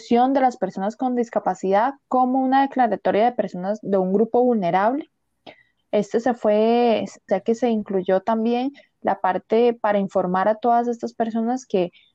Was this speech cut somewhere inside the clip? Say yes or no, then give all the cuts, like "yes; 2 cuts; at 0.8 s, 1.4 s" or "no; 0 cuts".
yes; 2 cuts; at 5.8 s, 7.3 s